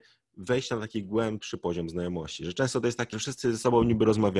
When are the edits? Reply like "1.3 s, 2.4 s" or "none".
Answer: 3.1 s